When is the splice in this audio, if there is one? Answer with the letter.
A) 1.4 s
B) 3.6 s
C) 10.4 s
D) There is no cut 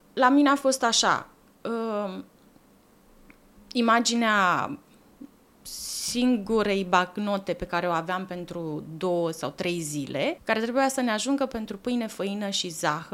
C